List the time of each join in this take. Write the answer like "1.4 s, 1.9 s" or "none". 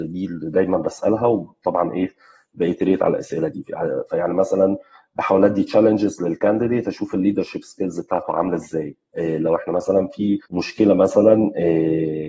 10.4 s